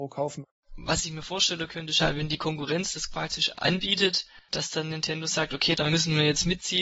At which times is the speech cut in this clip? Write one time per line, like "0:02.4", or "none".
0:05.8